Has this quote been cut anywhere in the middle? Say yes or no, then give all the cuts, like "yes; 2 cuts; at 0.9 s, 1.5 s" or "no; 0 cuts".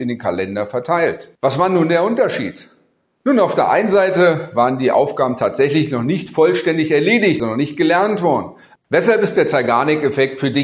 yes; 3 cuts; at 1.4 s, 7.4 s, 8.8 s